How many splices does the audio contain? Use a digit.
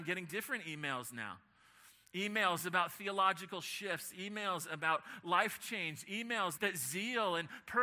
1